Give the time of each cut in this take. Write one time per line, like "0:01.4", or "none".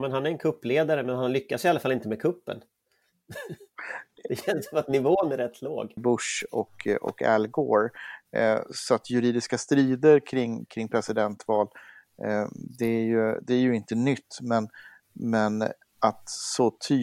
0:06.0